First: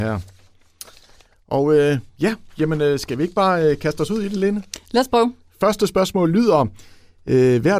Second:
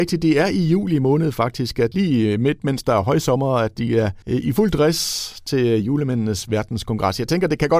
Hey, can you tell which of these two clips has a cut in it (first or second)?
second